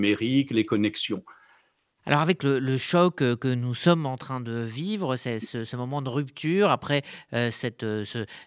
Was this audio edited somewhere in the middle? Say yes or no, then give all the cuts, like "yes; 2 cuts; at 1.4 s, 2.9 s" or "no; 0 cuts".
yes; 1 cut; at 2.0 s